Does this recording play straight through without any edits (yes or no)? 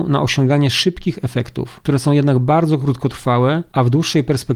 yes